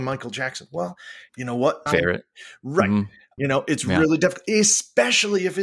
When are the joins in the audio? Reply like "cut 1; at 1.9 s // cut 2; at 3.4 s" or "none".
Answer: cut 1; at 1.9 s // cut 2; at 3.4 s